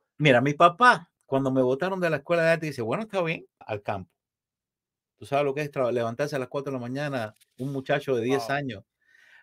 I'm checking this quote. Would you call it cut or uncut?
cut